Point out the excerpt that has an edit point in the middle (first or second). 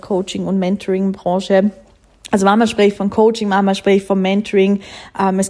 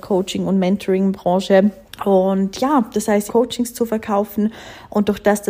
second